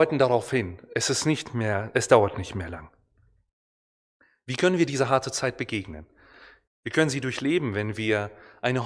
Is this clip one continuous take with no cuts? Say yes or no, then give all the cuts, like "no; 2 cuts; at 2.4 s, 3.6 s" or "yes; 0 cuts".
no; 1 cut; at 6.7 s